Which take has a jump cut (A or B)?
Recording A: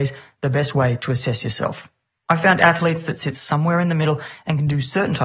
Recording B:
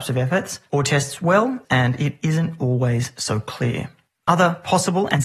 B